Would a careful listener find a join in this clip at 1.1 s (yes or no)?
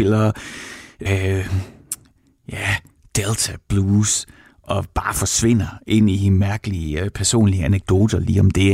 yes